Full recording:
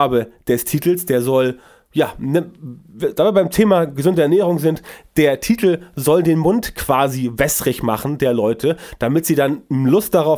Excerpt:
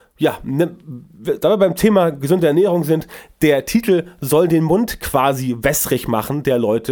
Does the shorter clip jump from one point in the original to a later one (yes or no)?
no